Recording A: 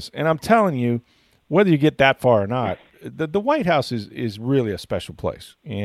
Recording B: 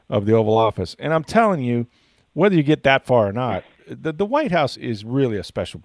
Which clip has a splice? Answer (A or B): B